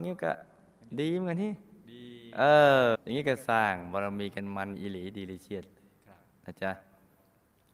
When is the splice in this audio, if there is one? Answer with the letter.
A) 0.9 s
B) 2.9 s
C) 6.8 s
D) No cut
B